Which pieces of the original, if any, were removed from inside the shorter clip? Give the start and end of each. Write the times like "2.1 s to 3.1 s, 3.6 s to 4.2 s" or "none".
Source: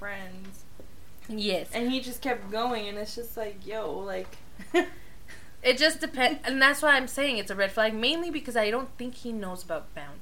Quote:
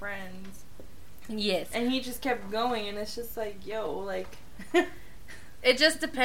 none